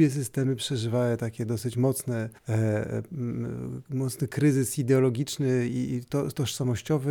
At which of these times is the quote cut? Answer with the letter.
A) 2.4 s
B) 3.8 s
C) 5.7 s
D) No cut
A